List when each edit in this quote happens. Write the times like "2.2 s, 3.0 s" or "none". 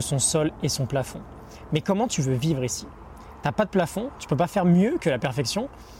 none